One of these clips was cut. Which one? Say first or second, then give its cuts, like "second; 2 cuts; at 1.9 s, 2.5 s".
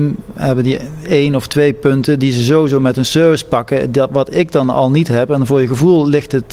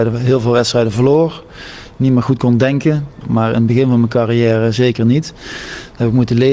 second; 1 cut; at 3.2 s